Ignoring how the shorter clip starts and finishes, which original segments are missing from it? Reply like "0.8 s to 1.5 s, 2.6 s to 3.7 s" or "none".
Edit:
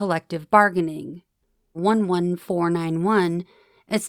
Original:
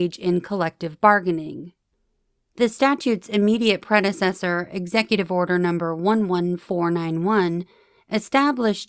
2.3 s to 6.0 s